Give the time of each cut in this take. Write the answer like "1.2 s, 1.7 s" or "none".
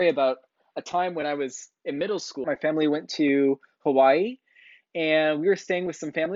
2.4 s